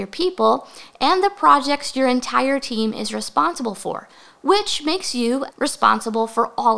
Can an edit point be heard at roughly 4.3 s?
no; 1 cut; at 5.5 s

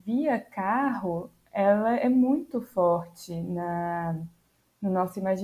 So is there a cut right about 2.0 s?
no; 0 cuts

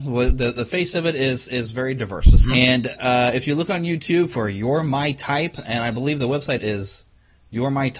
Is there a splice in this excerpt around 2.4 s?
yes; 2 cuts; at 2.4 s, 6.6 s

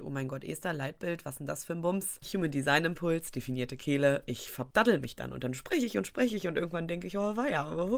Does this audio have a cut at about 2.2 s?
yes; 1 cut; at 2.2 s

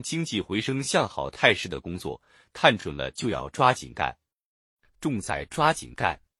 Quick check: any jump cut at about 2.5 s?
no; 1 cut; at 4.9 s

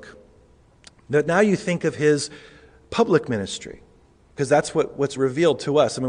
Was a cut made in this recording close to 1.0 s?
no; 1 cut; at 5.2 s

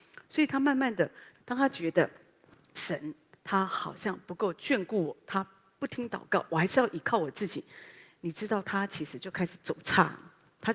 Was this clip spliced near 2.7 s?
no; 1 cut; at 1.3 s

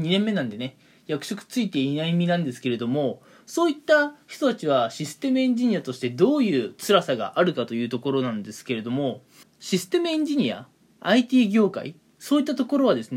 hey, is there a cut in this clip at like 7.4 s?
no; 1 cut; at 9.4 s

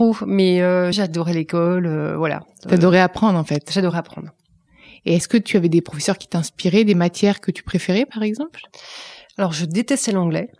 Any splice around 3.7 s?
no; 1 cut; at 0.9 s

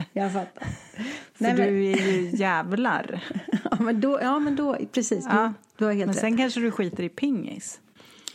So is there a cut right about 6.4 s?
no; 0 cuts

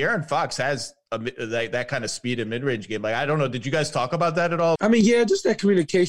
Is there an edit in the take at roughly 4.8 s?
yes; 1 cut; at 4.8 s

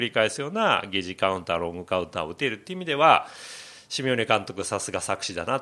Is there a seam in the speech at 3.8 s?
no; 0 cuts

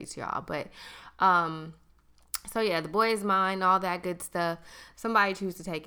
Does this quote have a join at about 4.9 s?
yes; 1 cut; at 4.9 s

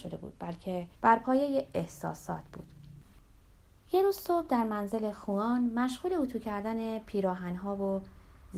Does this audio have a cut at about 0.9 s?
yes; 1 cut; at 0.9 s

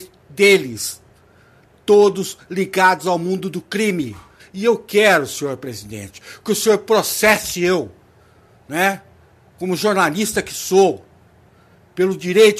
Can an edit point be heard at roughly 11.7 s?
no; 1 cut; at 4.4 s

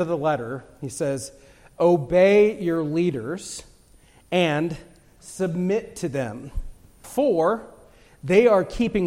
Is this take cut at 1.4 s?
no; 1 cut; at 7.0 s

